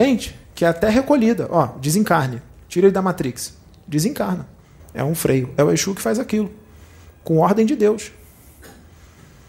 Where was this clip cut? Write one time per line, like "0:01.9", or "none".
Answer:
0:04.8